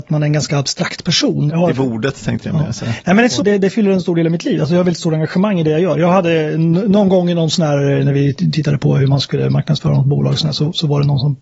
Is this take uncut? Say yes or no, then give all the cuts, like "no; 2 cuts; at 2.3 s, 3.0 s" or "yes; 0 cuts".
no; 2 cuts; at 1.5 s, 3.4 s